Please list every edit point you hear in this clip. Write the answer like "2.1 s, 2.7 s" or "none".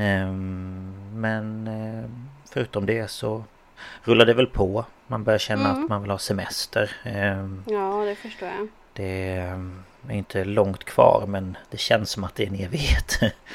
none